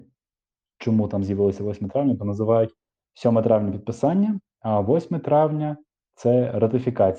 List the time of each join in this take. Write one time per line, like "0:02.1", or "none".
none